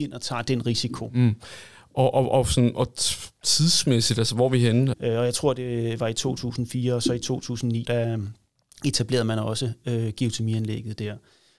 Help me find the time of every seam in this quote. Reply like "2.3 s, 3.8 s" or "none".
4.9 s, 7.8 s